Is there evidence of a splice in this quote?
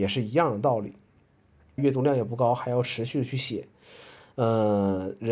yes; 1 cut; at 1.8 s

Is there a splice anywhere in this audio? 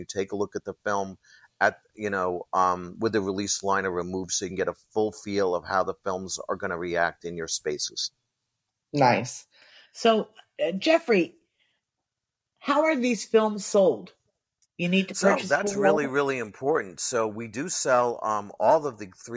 no; 0 cuts

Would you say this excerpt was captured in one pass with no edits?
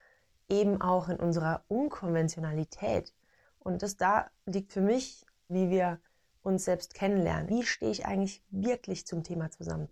no; 3 cuts; at 3.4 s, 5.5 s, 7.5 s

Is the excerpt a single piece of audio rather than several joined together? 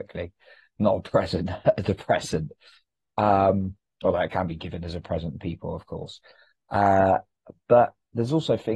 yes; 0 cuts

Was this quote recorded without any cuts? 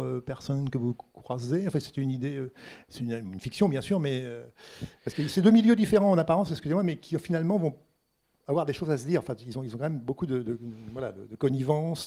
yes; 0 cuts

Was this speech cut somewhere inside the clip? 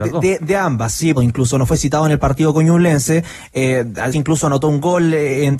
yes; 2 cuts; at 1.2 s, 4.1 s

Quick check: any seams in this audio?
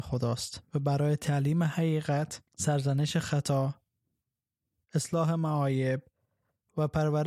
yes; 1 cut; at 2.5 s

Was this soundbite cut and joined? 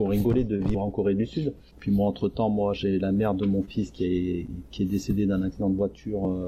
yes; 1 cut; at 1.7 s

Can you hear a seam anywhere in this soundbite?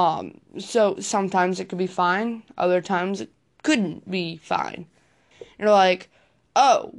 yes; 1 cut; at 5.3 s

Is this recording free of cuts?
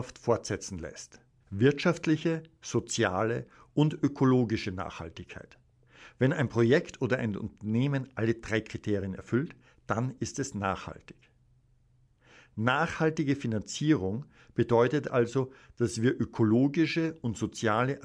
no; 1 cut; at 1.4 s

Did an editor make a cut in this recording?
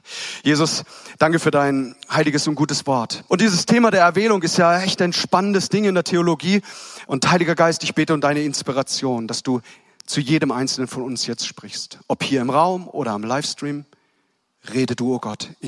yes; 2 cuts; at 3.3 s, 7.0 s

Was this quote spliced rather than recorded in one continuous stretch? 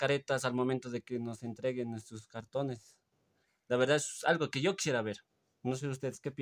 no; 0 cuts

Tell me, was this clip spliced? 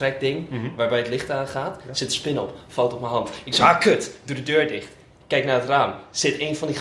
no; 0 cuts

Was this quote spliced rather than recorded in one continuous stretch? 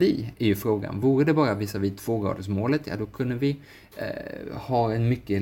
no; 0 cuts

